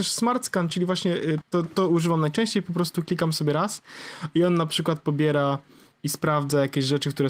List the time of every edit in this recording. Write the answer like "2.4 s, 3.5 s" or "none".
1.4 s